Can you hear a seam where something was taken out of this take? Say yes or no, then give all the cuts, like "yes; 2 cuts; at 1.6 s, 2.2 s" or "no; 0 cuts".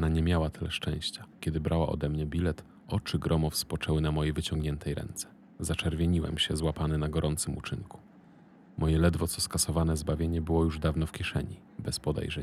yes; 1 cut; at 1.4 s